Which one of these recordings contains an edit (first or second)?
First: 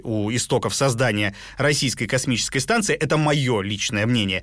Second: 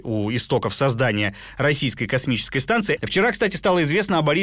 second